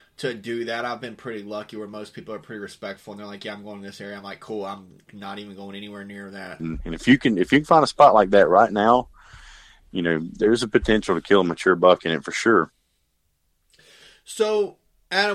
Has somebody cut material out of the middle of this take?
yes; 1 cut; at 6.6 s

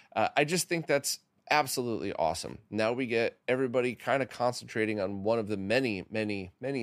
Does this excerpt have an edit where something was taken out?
no; 0 cuts

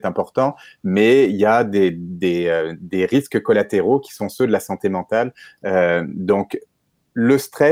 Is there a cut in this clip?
no; 0 cuts

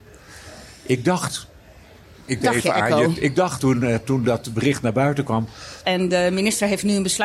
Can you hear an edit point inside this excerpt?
yes; 3 cuts; at 2.4 s, 3.6 s, 5.8 s

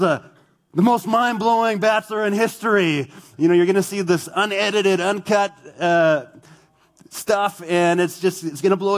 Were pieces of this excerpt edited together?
no; 0 cuts

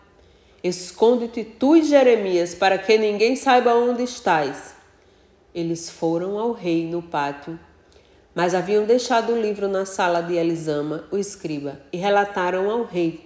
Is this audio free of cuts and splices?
yes; 0 cuts

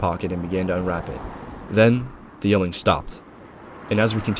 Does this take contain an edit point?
yes; 1 cut; at 1.7 s

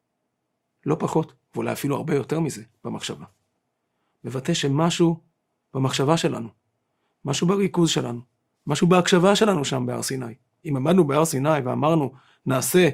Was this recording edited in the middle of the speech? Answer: no; 0 cuts

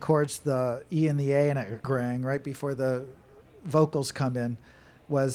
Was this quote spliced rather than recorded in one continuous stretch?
yes; 1 cut; at 1.8 s

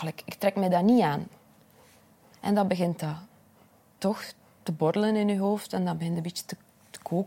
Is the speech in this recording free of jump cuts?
yes; 0 cuts

